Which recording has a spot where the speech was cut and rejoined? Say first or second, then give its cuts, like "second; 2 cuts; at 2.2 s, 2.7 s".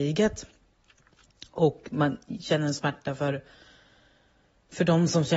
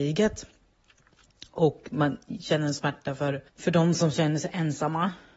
second; 1 cut; at 3.5 s